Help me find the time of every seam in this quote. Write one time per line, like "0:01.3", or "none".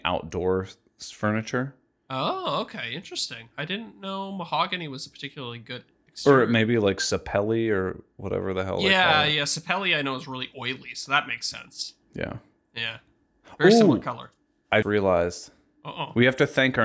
0:14.8